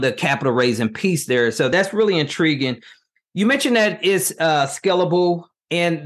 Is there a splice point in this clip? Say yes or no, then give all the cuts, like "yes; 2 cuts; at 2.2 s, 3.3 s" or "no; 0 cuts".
no; 0 cuts